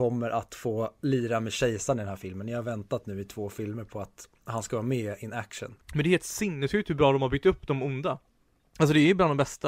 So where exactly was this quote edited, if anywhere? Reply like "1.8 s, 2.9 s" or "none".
5.8 s